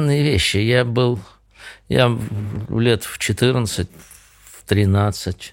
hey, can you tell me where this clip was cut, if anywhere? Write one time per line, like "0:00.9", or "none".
0:03.9